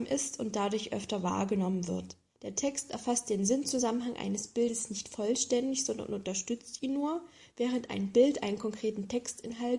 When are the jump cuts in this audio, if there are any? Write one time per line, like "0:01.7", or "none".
0:02.4